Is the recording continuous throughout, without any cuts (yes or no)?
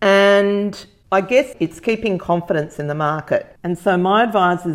no